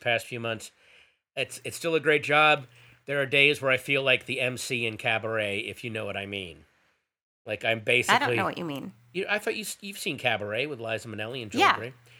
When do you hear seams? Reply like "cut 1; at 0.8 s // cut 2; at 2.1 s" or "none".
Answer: none